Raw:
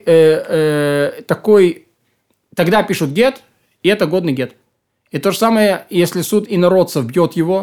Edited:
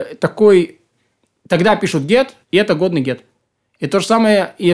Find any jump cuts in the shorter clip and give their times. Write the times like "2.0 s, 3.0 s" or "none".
2.4 s